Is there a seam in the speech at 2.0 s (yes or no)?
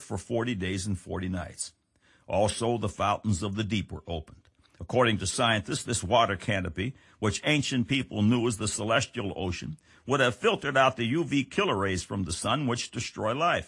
no